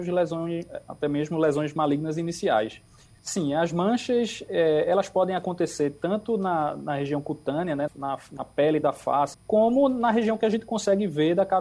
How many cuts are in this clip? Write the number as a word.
three